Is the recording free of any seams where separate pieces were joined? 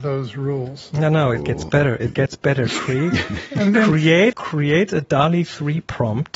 no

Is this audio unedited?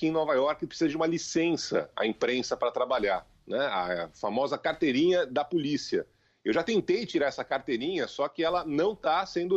yes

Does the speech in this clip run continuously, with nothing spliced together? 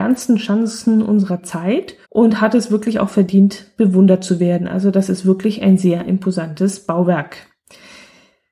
no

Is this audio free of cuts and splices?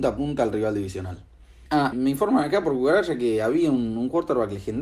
no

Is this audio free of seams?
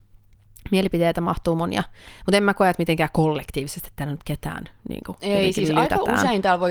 yes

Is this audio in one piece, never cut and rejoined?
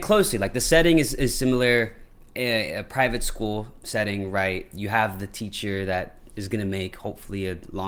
yes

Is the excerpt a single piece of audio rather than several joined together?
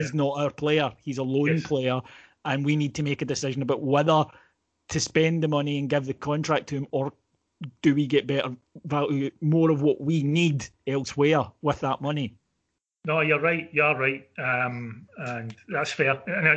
yes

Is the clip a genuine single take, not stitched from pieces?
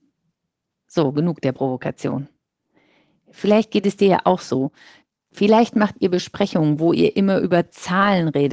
yes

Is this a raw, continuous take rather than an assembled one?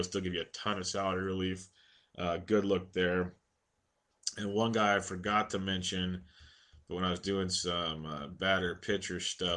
yes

